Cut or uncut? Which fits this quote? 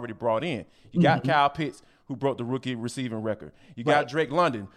uncut